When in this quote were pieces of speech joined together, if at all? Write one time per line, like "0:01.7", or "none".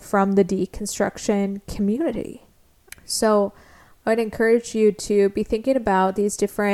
0:02.9